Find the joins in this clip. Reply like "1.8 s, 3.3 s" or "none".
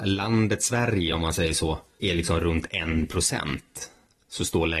none